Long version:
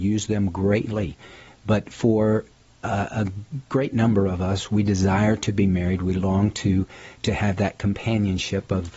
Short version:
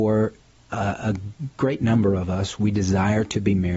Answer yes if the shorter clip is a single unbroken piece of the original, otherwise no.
yes